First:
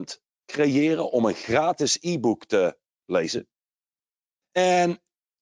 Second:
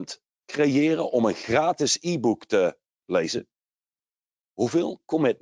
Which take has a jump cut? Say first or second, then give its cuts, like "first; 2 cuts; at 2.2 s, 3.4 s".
first; 1 cut; at 4.4 s